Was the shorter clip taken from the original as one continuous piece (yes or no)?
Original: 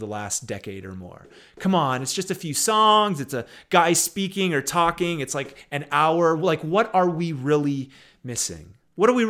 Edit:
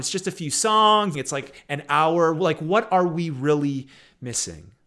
no